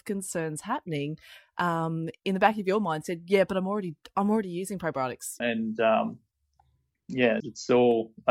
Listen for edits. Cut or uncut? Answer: cut